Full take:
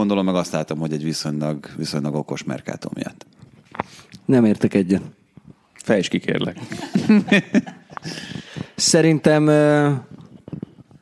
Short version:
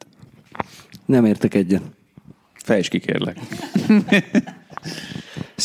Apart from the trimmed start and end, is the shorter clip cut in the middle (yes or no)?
no